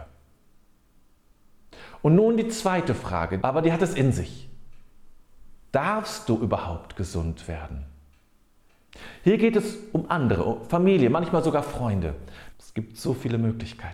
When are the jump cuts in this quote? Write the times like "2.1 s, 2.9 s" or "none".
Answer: 3.4 s, 12.5 s